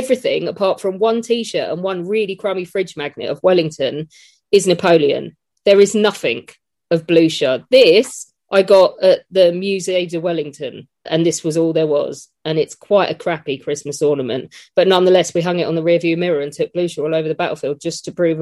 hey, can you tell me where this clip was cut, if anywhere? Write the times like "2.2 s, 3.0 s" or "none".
11.1 s